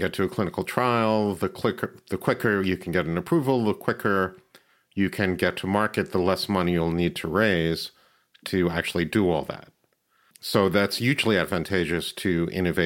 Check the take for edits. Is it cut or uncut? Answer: uncut